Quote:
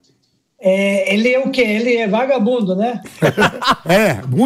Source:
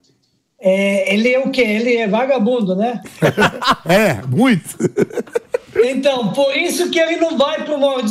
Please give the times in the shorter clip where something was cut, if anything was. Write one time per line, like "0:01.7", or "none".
none